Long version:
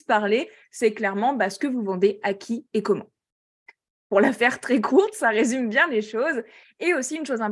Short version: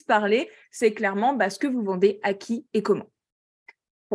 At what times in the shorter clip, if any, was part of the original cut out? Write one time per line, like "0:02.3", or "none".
none